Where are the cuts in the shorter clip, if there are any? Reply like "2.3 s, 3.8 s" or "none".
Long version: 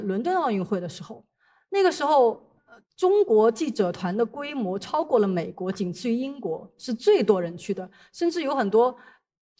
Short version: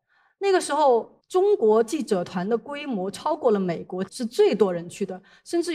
1.2 s, 4.1 s